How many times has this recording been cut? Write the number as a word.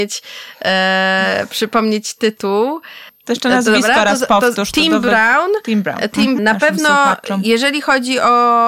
one